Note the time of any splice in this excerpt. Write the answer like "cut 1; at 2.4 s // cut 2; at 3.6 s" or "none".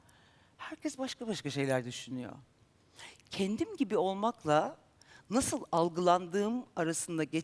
none